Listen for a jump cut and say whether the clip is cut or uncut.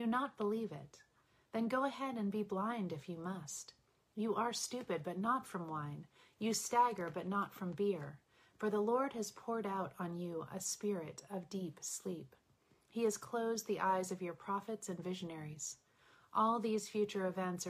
uncut